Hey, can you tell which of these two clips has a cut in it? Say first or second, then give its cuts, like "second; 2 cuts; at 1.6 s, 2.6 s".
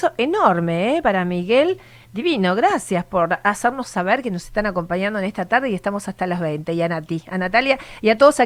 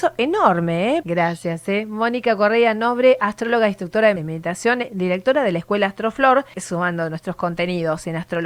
second; 3 cuts; at 1.0 s, 4.2 s, 6.5 s